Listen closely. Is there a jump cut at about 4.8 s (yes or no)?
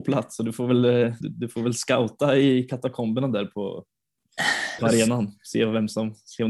yes